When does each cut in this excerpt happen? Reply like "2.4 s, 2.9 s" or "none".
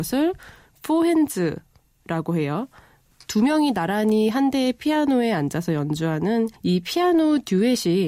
3.1 s, 6.6 s